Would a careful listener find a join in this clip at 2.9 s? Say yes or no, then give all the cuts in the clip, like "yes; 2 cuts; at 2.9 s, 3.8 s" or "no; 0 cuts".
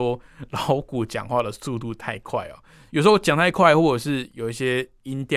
yes; 1 cut; at 2.9 s